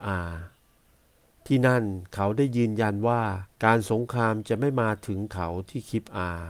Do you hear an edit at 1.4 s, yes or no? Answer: no